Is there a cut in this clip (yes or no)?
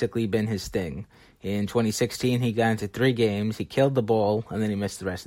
no